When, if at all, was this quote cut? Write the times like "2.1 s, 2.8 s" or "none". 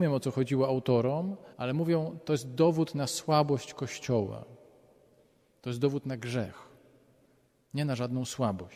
1.5 s, 5.5 s